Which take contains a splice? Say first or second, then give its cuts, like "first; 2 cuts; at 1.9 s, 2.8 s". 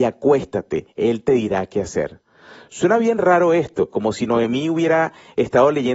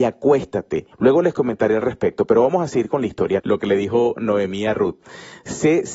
second; 2 cuts; at 0.9 s, 3.4 s